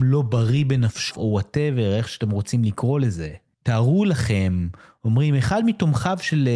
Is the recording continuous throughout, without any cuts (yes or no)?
no